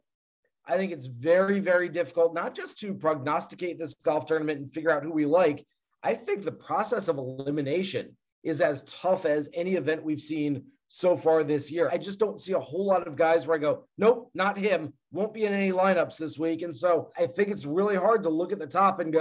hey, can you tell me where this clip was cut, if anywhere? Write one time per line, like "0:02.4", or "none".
none

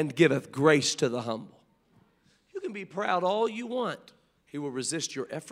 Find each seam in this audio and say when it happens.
0:04.4

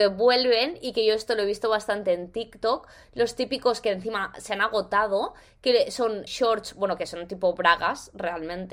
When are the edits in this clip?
0:06.3

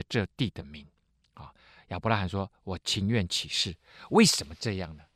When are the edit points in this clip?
none

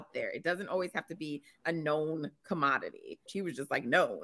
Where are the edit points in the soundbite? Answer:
0:03.3

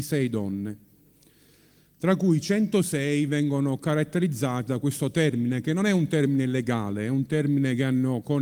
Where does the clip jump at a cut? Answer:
none

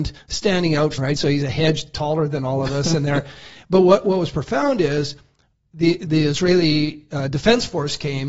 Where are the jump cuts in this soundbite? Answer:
0:01.0

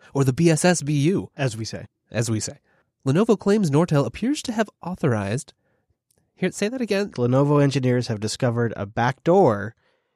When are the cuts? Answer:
0:07.1

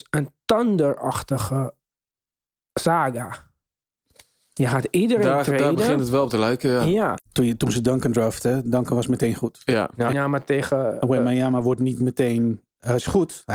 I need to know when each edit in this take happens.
0:07.2
0:10.1

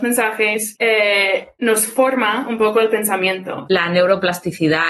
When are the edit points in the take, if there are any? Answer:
0:01.6
0:03.7

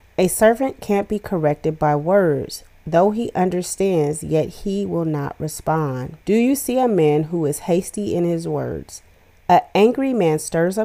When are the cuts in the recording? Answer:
0:06.2
0:09.4

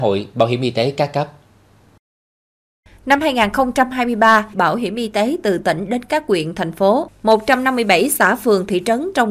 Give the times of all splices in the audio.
0:04.5

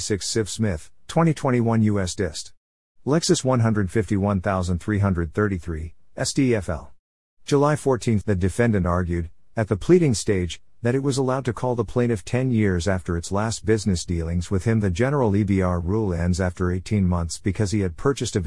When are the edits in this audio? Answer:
0:08.2

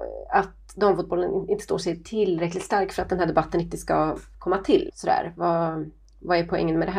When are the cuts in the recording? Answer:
0:04.9

